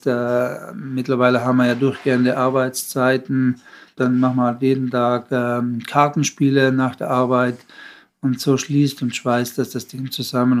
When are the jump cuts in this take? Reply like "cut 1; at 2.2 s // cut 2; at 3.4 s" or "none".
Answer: cut 1; at 4.0 s